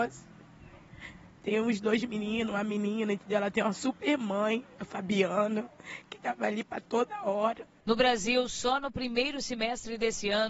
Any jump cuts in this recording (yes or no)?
no